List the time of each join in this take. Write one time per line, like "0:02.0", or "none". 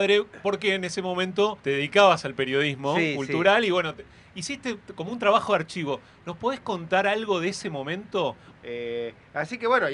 0:01.6
0:08.5